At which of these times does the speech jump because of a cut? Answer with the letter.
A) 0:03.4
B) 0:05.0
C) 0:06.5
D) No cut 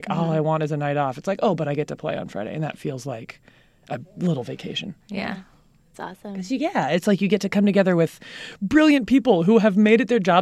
D